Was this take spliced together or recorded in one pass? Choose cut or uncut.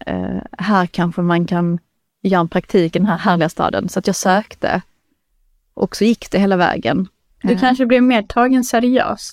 cut